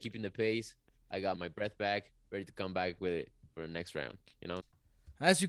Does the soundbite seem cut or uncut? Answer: cut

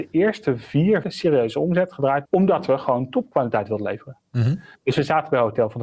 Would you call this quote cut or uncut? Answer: cut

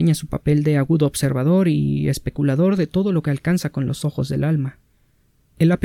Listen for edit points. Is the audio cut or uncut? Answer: uncut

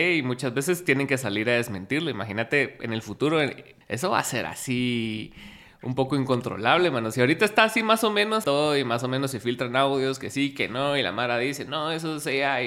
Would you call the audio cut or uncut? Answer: cut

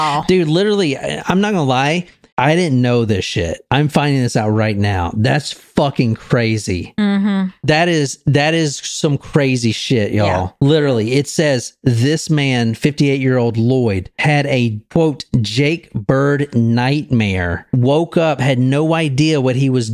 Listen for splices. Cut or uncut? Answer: cut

